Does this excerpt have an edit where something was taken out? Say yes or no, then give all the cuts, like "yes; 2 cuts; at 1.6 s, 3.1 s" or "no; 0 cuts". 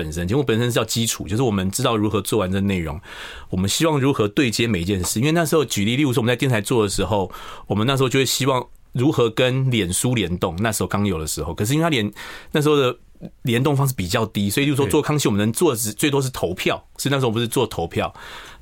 no; 0 cuts